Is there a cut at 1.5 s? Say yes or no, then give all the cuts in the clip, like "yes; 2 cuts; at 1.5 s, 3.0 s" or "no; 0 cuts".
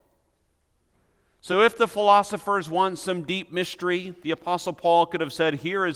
no; 0 cuts